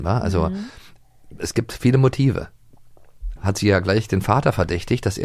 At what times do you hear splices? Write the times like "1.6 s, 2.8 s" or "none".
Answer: 3.4 s